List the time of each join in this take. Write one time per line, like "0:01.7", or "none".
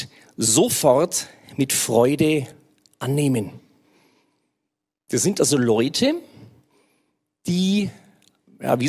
none